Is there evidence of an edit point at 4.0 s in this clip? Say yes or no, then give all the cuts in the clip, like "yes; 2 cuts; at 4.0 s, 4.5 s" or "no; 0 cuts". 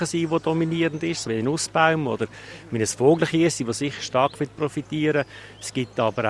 no; 1 cut; at 1.2 s